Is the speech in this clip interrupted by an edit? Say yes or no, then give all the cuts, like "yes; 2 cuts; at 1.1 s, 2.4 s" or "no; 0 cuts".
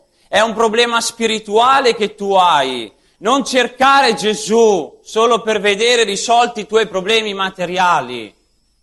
no; 0 cuts